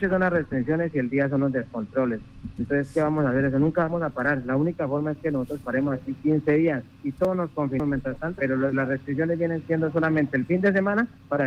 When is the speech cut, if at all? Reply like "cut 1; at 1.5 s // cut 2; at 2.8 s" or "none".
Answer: cut 1; at 6.9 s // cut 2; at 8.4 s